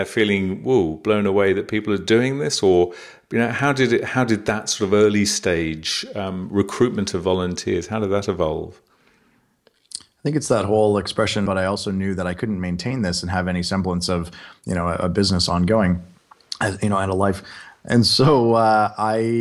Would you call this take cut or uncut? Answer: cut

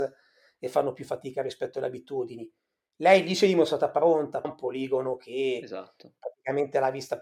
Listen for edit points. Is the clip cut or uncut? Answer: cut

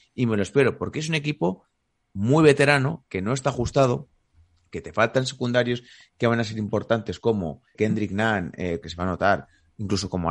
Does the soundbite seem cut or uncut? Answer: cut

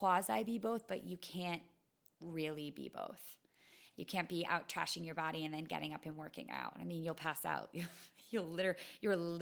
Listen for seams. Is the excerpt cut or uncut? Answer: uncut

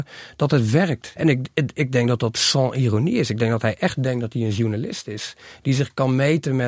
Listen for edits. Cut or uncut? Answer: cut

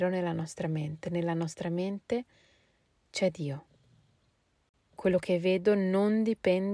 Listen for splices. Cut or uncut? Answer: cut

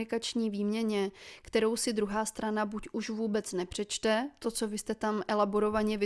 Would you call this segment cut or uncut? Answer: uncut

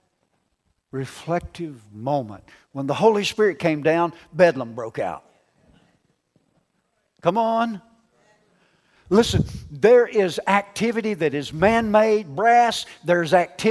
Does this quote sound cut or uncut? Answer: uncut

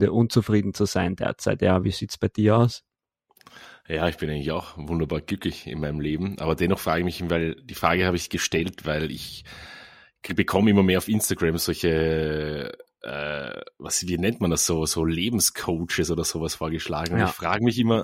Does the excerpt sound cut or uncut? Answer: uncut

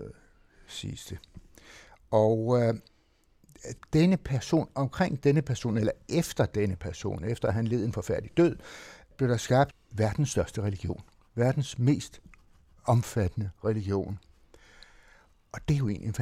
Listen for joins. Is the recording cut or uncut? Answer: cut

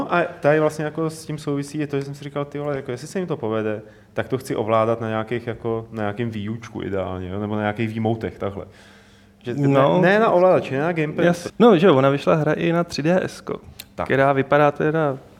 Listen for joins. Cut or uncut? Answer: cut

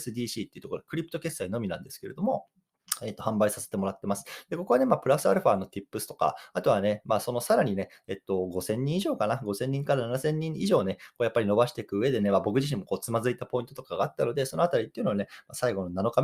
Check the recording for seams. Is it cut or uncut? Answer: uncut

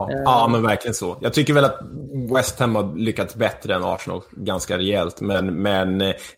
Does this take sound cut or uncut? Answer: uncut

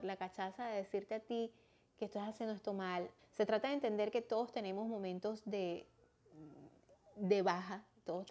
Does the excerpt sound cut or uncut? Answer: cut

